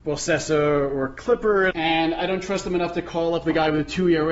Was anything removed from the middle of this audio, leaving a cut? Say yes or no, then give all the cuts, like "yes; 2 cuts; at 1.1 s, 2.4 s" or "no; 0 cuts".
yes; 1 cut; at 1.7 s